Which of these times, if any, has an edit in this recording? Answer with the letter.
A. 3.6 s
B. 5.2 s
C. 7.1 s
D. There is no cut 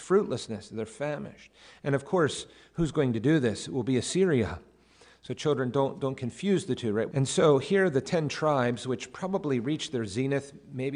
C